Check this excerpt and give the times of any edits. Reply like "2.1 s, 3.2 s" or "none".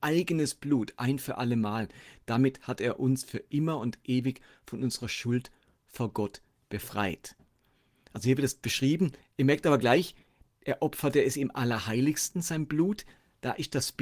none